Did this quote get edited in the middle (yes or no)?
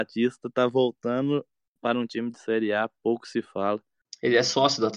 no